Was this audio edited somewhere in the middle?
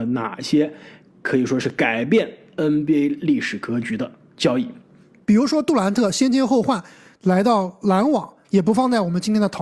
yes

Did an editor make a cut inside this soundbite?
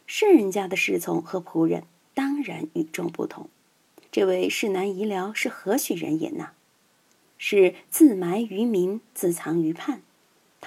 yes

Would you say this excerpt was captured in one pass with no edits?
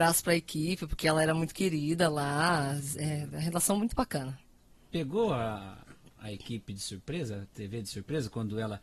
yes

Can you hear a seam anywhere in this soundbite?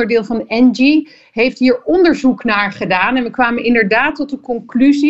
no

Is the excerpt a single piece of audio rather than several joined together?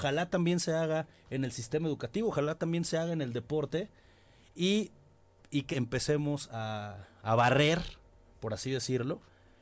no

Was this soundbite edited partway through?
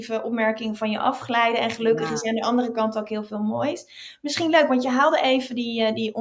no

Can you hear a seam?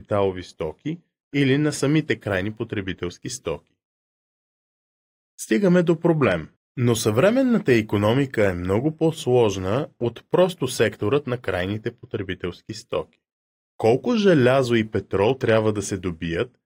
yes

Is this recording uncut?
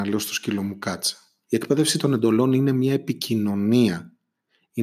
no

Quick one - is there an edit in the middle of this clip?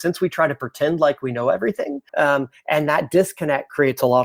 yes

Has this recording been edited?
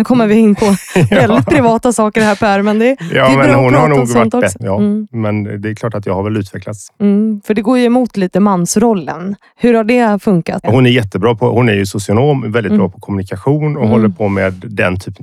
yes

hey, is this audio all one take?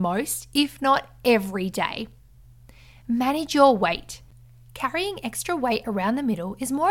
yes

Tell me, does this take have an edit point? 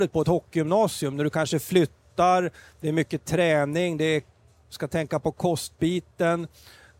no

